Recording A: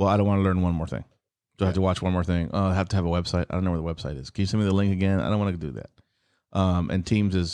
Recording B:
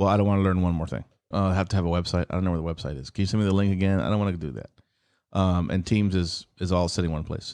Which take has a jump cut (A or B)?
B